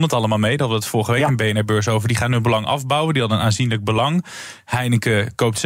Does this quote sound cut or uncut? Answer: uncut